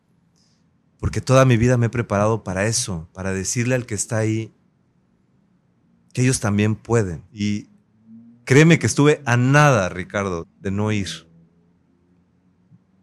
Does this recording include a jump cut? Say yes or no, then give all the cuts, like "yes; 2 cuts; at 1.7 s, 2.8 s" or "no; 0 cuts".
yes; 2 cuts; at 7.3 s, 10.4 s